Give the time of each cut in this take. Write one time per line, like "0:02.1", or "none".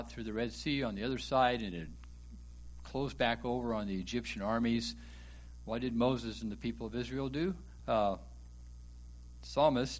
0:07.8